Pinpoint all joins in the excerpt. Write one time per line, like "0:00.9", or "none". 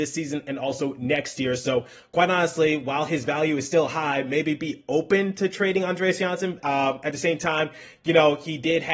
0:06.6